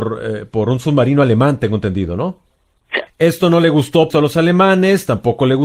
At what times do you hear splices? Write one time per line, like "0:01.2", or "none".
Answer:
0:03.1
0:04.1